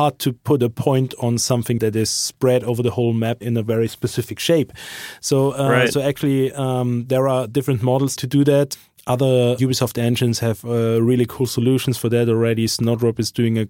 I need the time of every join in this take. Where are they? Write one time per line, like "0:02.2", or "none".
none